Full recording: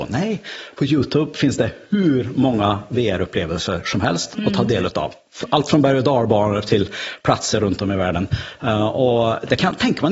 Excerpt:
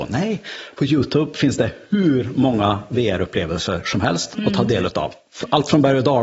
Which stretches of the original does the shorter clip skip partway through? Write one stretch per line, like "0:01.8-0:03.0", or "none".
none